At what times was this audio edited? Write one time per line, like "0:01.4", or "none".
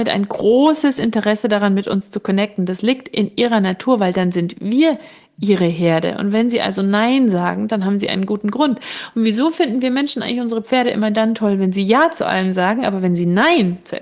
none